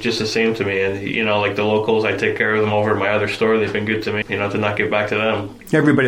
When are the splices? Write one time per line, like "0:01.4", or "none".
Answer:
0:04.2